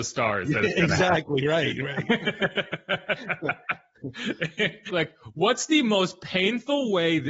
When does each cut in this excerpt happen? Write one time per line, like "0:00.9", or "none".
0:04.9

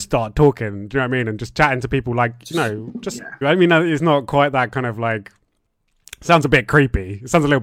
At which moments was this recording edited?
0:03.4

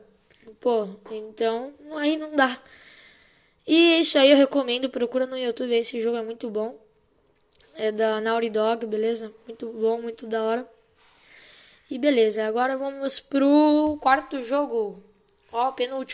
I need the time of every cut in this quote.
none

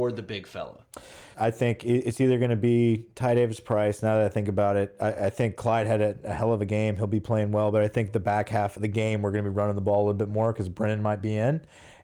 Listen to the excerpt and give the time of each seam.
0:01.3
0:08.8

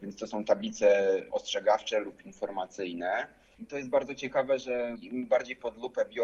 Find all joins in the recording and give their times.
0:03.6

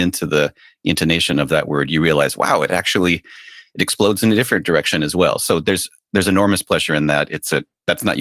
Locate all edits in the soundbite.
none

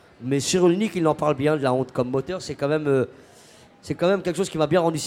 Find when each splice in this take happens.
none

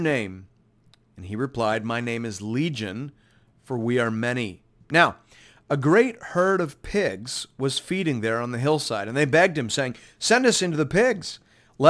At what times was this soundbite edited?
0:04.8

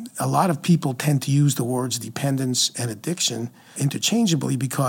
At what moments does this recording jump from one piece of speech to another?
0:03.8

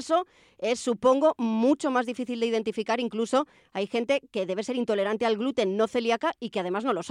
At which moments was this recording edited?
none

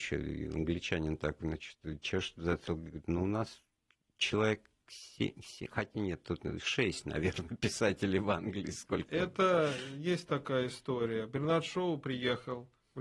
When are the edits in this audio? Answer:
none

